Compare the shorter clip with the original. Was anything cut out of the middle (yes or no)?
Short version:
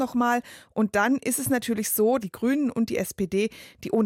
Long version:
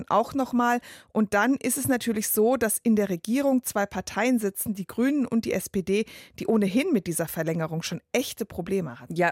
yes